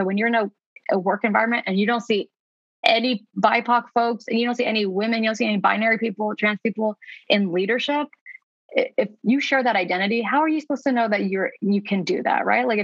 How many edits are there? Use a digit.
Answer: 0